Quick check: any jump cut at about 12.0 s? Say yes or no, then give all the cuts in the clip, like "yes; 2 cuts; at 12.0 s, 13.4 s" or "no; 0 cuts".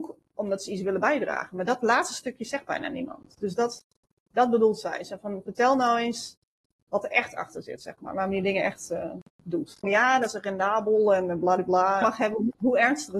yes; 2 cuts; at 9.8 s, 12.0 s